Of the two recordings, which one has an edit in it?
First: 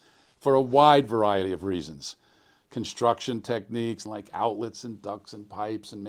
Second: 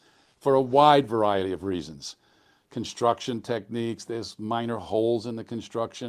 first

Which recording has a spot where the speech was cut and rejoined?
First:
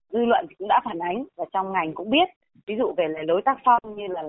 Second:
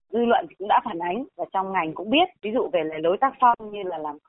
second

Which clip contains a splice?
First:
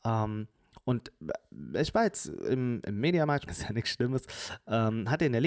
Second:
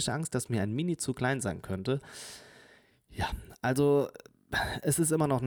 first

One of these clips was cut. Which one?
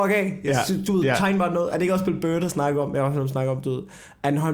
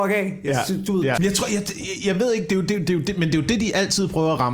second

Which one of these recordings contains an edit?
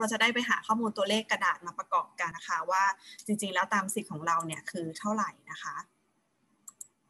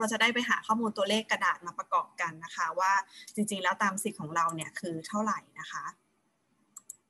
first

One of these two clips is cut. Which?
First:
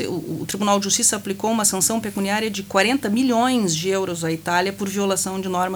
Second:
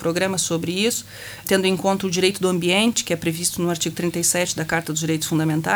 second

